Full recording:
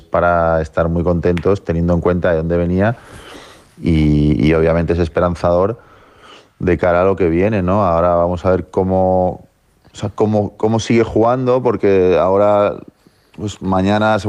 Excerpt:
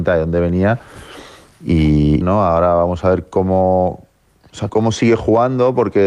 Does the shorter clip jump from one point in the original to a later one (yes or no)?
yes